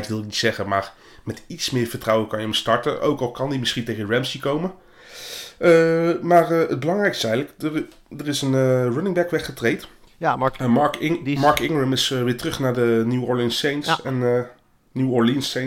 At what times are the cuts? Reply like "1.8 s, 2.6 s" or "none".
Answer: none

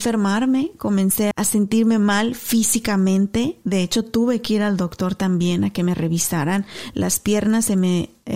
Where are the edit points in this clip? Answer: 1.3 s

